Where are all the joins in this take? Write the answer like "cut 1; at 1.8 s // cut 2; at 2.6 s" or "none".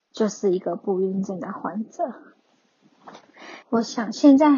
cut 1; at 3.6 s